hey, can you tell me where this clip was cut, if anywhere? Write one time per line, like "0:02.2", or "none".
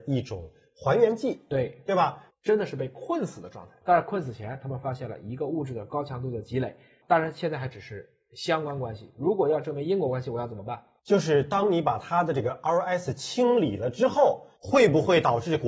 0:02.3